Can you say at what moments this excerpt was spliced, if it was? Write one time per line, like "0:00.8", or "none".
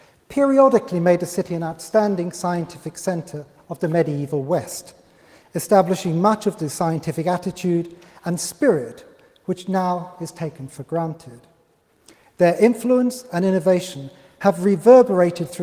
none